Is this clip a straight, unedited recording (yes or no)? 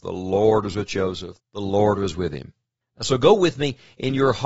no